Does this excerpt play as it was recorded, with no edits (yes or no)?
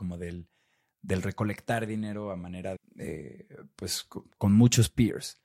no